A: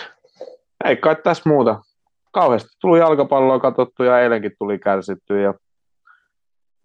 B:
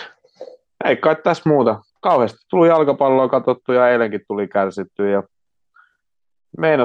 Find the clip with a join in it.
B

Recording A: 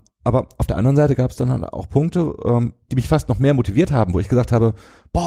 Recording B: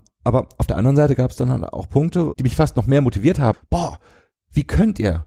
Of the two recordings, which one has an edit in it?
B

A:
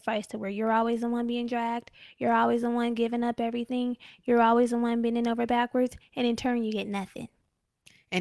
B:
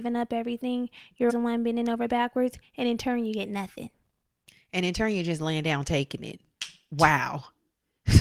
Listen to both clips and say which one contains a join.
B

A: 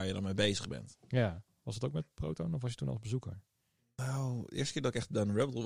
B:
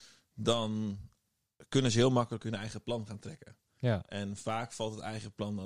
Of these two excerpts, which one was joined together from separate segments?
A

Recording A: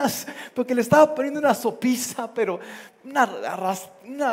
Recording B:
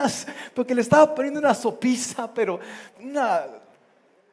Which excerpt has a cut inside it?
B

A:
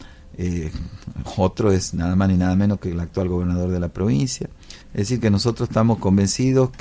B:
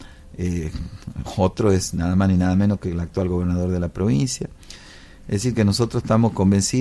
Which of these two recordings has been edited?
A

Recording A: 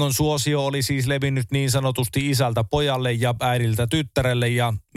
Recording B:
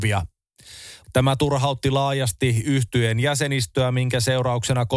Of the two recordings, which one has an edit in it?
B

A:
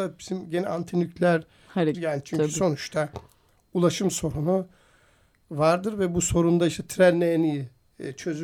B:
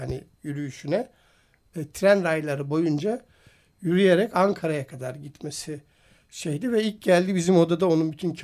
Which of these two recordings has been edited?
A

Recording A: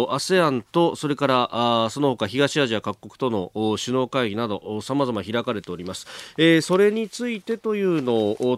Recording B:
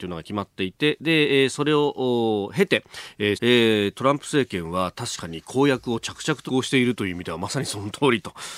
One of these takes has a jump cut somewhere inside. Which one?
B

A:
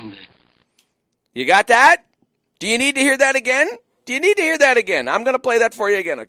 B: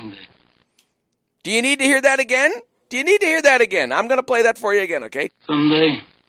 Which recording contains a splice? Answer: B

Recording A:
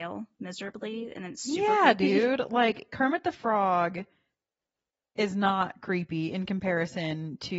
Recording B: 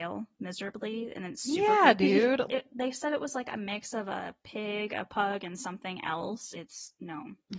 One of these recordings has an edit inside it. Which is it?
B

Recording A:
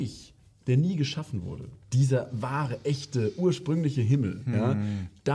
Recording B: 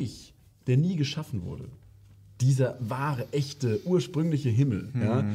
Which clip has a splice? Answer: A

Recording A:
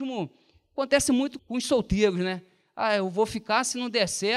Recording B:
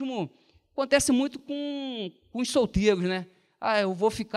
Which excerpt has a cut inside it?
A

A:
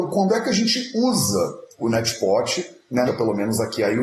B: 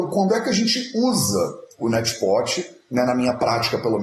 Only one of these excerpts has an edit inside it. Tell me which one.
A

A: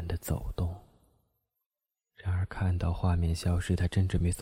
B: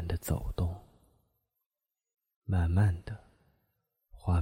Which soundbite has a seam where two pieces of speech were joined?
A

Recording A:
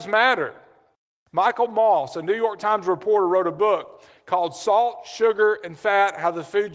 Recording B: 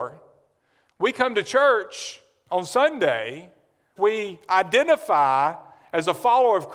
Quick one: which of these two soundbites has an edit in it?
B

